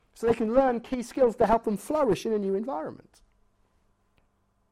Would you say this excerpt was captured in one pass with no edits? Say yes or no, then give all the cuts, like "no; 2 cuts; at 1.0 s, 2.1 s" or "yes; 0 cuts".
yes; 0 cuts